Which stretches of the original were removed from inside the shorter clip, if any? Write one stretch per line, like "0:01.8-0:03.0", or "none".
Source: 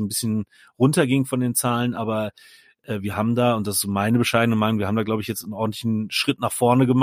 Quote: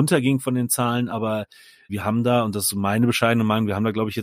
0:02.7-0:03.0